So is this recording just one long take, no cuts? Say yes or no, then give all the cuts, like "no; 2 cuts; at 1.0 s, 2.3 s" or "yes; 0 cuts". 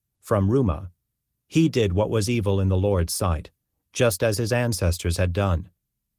yes; 0 cuts